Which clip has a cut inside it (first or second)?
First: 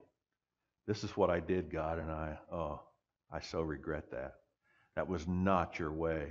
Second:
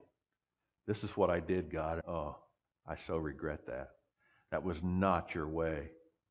second